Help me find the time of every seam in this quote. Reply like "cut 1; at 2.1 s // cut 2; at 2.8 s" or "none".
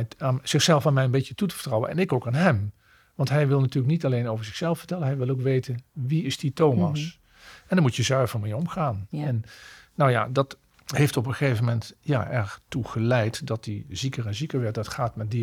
cut 1; at 10.7 s